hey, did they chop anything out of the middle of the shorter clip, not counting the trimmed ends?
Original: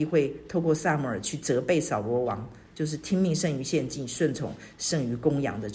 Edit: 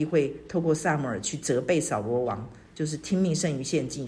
no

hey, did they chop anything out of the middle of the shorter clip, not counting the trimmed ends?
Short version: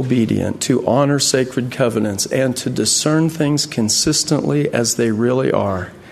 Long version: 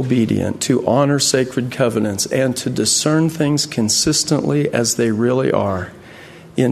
no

